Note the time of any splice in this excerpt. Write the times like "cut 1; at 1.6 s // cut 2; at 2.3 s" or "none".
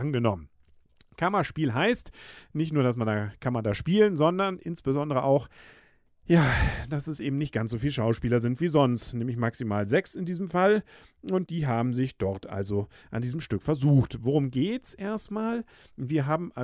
cut 1; at 11.5 s